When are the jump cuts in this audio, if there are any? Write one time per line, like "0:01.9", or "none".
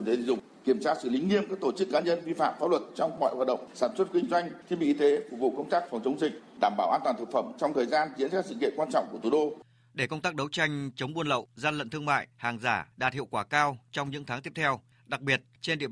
none